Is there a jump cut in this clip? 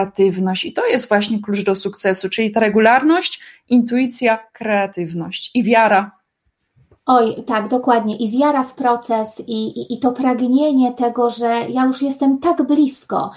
no; 0 cuts

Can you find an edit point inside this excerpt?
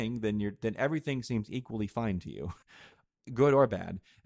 yes; 1 cut; at 2.6 s

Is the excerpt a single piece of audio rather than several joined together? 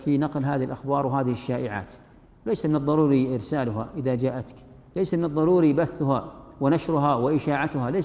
yes; 0 cuts

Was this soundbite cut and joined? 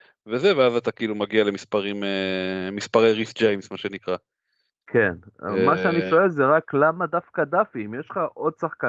no; 0 cuts

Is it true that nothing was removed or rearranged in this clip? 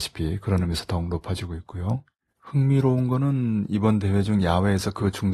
yes; 0 cuts

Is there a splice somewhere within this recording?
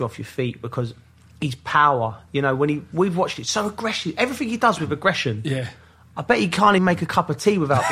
yes; 1 cut; at 6.8 s

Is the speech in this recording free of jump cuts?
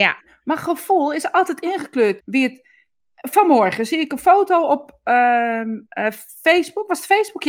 no; 1 cut; at 2.2 s

